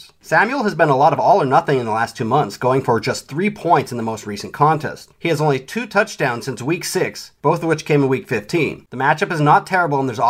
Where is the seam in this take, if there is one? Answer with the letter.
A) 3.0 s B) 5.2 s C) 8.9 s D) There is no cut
C